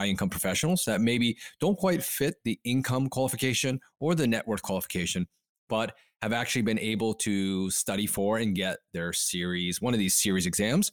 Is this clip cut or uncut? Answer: uncut